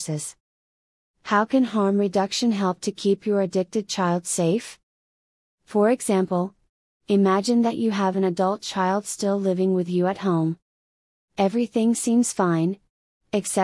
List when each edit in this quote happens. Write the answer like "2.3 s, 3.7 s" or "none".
11.2 s